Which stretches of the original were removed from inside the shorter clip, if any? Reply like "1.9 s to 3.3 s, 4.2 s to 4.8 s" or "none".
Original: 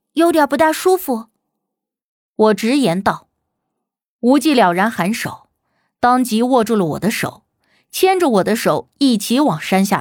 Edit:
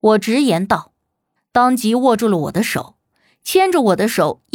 3.7 s to 5.8 s